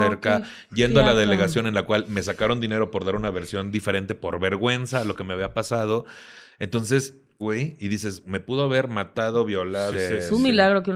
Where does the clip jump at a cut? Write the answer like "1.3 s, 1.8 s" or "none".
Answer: 7.4 s, 9.9 s